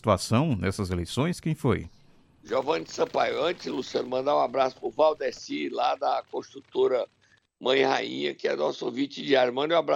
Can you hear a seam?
no; 0 cuts

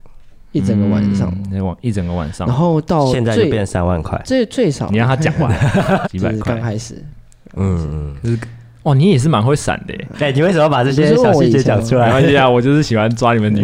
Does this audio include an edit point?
yes; 2 cuts; at 6.0 s, 10.1 s

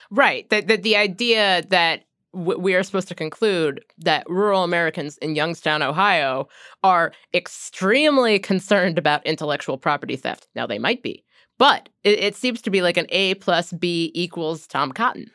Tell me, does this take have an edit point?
no; 0 cuts

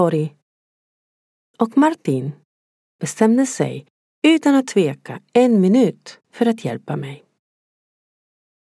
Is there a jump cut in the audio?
yes; 2 cuts; at 2.9 s, 6.2 s

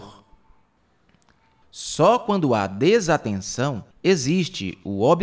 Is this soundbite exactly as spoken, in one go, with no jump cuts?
no; 2 cuts; at 1.6 s, 3.9 s

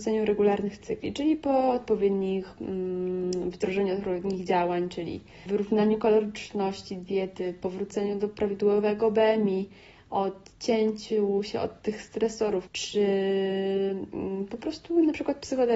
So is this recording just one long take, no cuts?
no; 2 cuts; at 5.5 s, 12.7 s

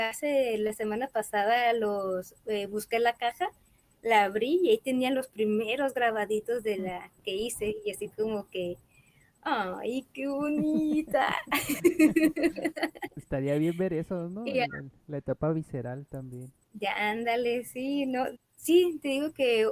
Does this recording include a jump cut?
yes; 2 cuts; at 16.6 s, 18.3 s

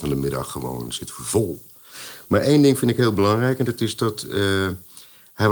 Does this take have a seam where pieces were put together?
no; 0 cuts

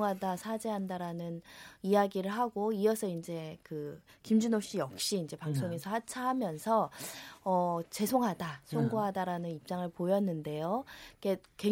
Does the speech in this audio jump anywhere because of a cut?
no; 0 cuts

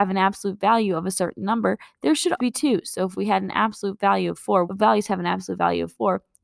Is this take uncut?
no; 2 cuts; at 2.4 s, 4.6 s

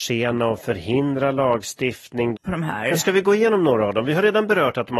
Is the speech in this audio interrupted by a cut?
yes; 1 cut; at 2.4 s

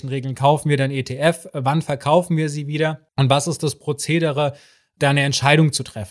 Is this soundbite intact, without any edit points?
no; 1 cut; at 3.1 s

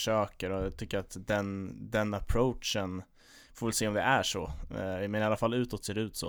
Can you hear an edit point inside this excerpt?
no; 0 cuts

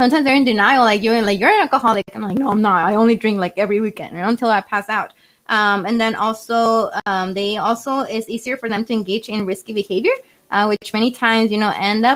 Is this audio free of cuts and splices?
yes; 0 cuts

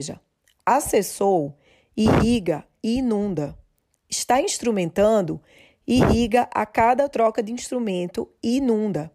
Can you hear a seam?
no; 0 cuts

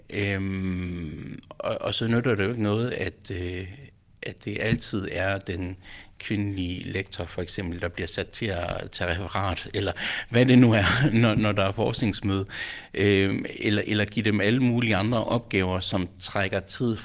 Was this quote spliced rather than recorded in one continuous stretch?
no; 0 cuts

